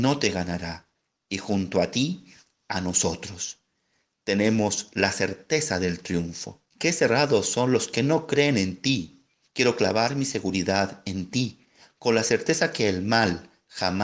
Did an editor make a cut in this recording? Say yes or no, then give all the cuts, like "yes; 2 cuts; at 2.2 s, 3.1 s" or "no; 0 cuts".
yes; 2 cuts; at 6.7 s, 9.4 s